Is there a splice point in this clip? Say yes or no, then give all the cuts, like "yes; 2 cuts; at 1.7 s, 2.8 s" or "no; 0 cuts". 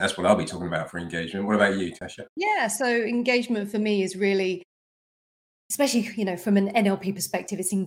no; 0 cuts